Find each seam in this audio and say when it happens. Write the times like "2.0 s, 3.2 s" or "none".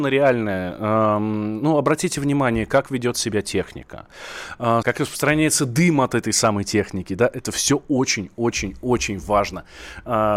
4.8 s